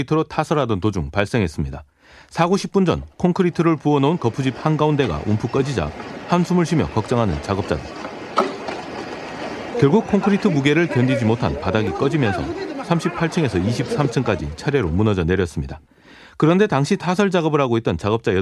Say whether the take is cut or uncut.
cut